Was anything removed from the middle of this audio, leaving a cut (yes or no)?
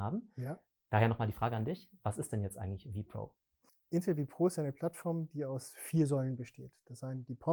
no